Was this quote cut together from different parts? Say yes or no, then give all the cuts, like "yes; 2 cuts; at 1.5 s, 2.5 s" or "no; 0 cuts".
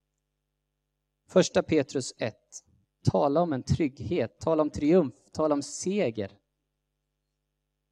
yes; 1 cut; at 2.8 s